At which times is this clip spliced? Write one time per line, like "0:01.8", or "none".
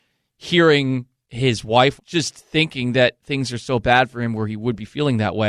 0:02.0